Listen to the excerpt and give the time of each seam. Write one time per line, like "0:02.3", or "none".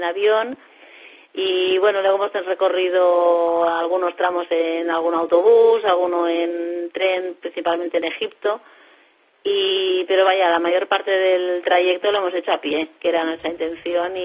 none